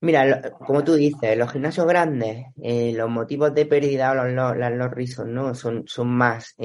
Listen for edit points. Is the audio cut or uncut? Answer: uncut